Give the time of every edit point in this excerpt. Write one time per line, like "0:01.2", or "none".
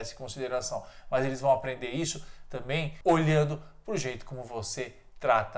none